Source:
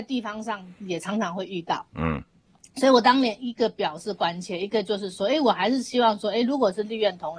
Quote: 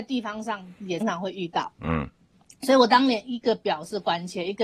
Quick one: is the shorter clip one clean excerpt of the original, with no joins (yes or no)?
no